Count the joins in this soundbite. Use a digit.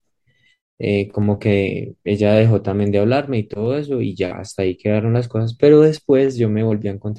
0